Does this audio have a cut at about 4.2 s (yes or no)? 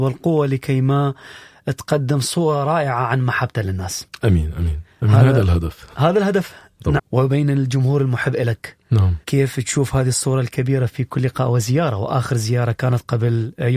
no